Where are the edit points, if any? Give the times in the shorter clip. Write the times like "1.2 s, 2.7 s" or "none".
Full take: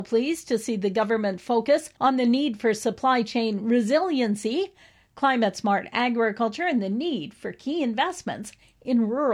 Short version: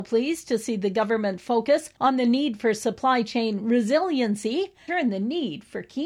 4.9 s